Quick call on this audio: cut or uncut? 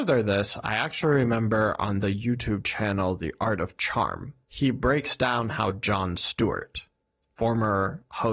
cut